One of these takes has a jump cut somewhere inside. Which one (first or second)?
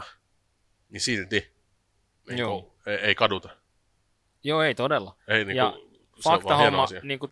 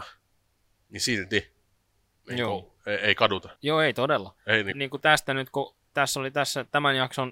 second